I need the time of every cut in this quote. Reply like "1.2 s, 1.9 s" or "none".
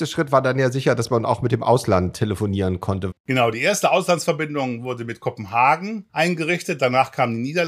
3.1 s, 6.1 s